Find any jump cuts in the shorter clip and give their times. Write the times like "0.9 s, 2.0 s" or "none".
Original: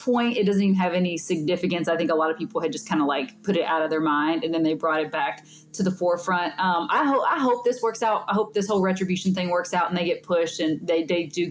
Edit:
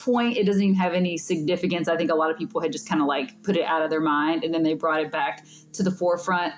none